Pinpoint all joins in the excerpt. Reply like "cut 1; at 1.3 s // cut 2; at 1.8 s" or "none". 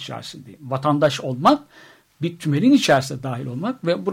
none